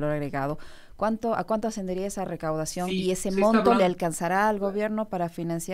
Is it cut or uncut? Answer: uncut